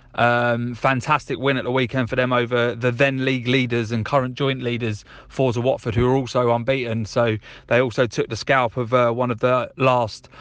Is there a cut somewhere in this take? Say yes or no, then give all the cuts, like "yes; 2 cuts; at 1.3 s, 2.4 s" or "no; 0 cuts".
no; 0 cuts